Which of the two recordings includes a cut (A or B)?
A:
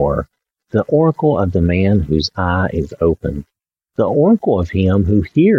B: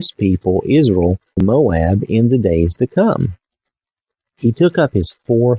B